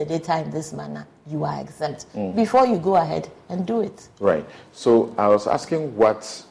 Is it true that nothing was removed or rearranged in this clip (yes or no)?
yes